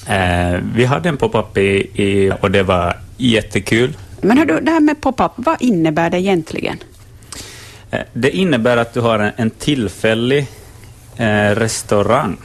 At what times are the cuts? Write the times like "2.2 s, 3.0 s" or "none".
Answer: 2.3 s, 4.2 s, 5.4 s

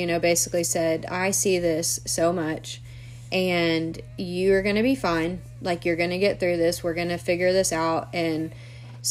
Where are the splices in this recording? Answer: none

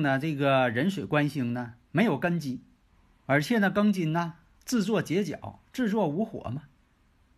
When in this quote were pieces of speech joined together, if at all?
none

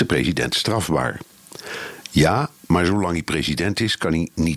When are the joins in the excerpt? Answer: none

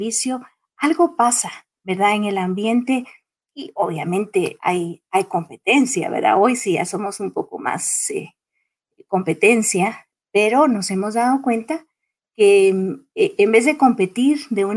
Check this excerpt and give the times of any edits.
none

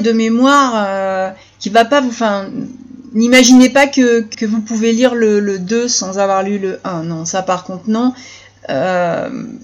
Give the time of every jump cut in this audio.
4.3 s

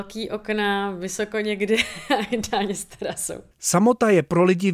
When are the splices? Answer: 3.5 s

